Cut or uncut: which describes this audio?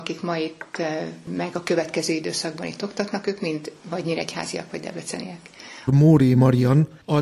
cut